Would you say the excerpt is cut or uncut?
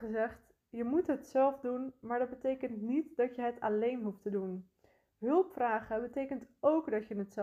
uncut